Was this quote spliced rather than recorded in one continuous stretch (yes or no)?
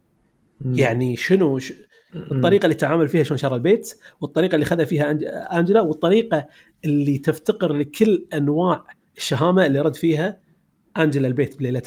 yes